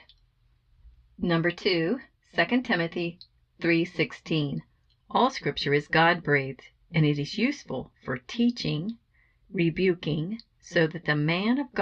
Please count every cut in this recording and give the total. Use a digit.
2